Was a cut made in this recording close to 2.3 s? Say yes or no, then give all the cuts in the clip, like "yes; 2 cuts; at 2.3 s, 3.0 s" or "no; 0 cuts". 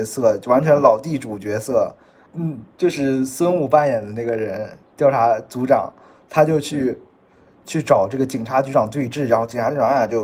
yes; 1 cut; at 2.3 s